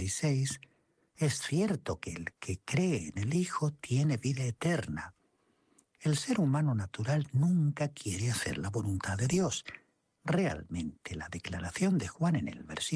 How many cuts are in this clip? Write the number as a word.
one